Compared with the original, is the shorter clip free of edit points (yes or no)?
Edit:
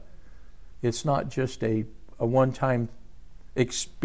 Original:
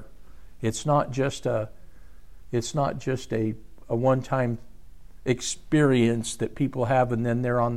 yes